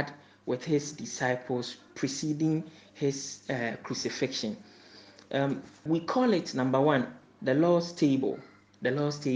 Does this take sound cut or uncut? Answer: cut